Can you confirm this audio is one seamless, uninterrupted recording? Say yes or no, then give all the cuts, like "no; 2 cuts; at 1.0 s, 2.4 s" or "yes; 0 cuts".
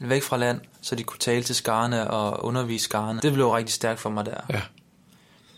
no; 1 cut; at 3.2 s